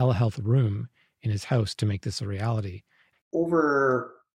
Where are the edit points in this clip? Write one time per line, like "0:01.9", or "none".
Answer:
0:03.2